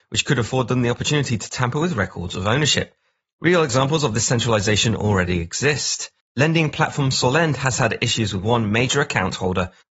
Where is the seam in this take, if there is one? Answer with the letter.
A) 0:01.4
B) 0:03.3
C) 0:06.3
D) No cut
B